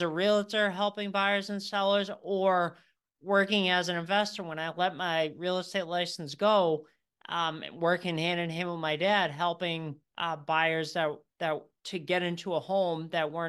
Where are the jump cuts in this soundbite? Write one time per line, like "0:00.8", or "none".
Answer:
none